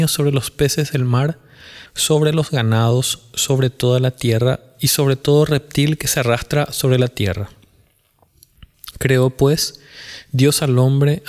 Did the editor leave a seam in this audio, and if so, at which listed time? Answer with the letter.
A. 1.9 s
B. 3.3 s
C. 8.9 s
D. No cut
A